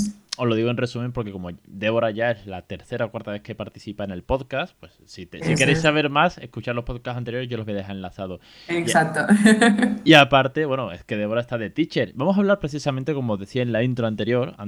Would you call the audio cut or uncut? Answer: uncut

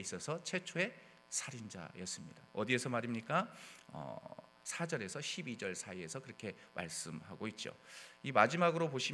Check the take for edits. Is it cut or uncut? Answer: cut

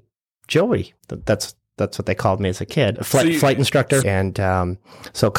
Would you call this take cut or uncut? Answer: cut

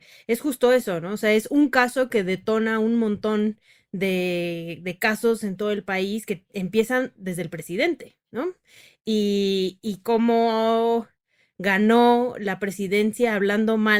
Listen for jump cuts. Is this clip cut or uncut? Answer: uncut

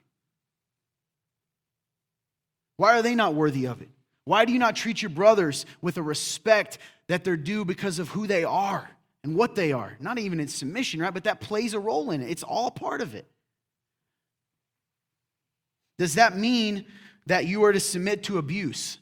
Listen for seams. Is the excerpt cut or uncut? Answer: uncut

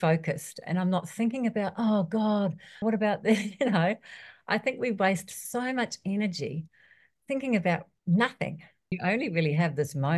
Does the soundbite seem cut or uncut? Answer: cut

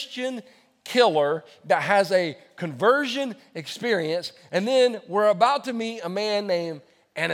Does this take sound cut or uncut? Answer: uncut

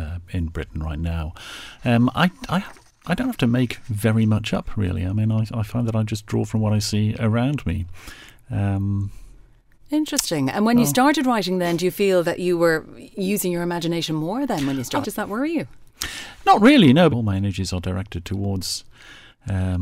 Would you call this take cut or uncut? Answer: cut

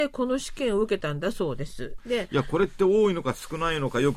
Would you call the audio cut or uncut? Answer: cut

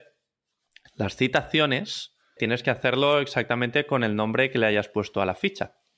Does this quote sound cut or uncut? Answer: cut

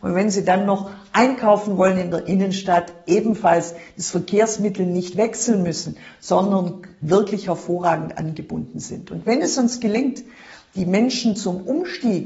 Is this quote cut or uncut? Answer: uncut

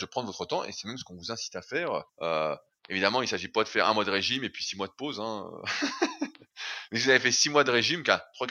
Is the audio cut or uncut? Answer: cut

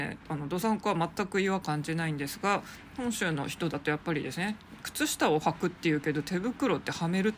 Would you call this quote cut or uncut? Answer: cut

